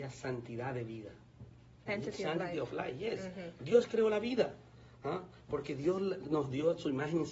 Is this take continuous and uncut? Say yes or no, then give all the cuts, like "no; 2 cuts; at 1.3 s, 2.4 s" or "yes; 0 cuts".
no; 1 cut; at 1.9 s